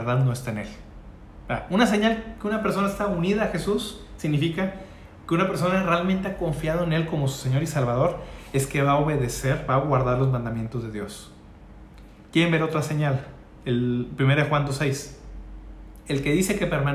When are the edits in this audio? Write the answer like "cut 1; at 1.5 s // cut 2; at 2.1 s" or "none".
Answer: none